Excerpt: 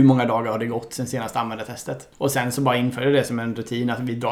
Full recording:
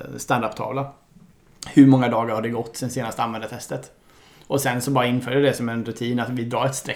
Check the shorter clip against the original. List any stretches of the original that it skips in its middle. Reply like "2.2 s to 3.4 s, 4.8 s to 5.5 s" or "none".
4.0 s to 4.4 s